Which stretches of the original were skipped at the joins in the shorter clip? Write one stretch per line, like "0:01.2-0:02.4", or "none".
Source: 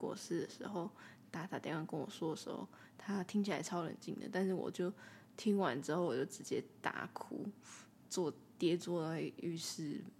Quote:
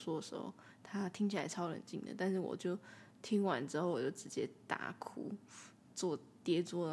none